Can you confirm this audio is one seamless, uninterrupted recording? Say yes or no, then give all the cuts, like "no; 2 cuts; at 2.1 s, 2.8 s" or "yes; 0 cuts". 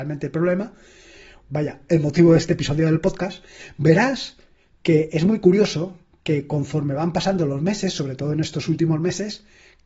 no; 1 cut; at 1.4 s